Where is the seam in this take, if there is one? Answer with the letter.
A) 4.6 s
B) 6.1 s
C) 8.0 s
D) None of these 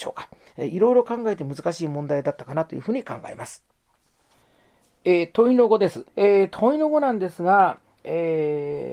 B